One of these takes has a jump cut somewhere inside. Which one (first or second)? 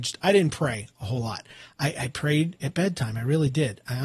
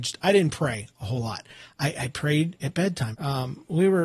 second